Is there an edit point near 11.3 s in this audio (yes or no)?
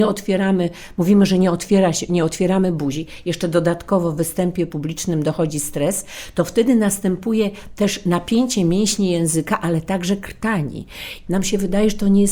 yes